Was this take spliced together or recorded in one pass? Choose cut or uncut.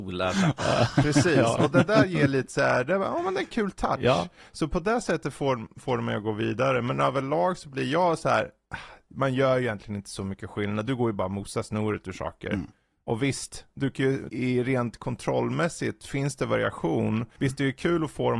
cut